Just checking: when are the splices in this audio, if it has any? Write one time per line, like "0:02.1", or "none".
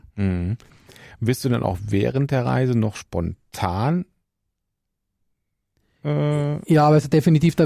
0:01.1